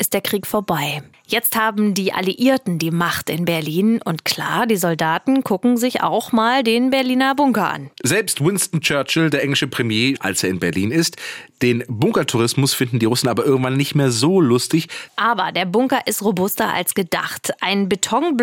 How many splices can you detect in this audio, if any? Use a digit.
2